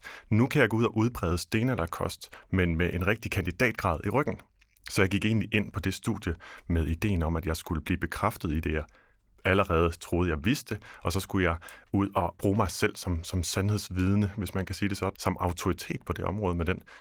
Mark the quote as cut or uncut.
cut